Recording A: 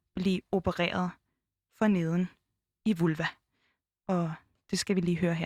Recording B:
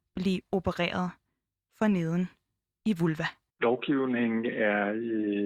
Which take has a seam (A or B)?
B